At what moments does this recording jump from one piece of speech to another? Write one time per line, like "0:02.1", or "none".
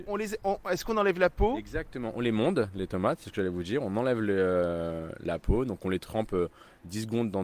none